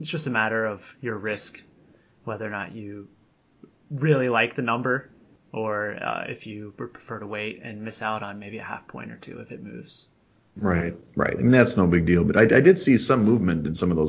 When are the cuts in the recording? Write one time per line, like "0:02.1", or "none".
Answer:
none